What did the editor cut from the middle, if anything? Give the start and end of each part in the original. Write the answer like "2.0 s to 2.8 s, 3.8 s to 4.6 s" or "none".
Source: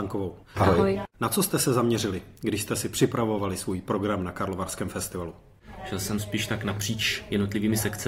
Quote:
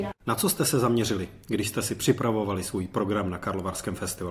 none